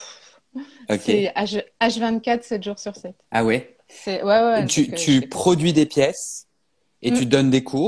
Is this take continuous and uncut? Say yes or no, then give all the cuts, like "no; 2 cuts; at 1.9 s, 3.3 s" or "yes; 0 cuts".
no; 1 cut; at 4.7 s